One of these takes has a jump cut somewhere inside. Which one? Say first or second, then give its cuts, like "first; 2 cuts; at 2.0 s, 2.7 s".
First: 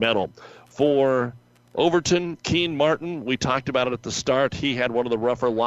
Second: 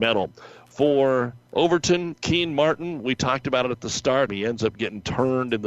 second; 2 cuts; at 1.5 s, 4.3 s